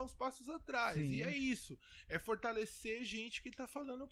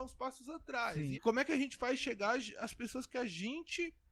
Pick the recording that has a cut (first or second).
second